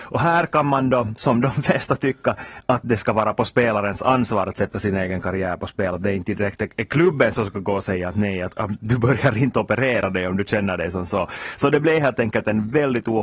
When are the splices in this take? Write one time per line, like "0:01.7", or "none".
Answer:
none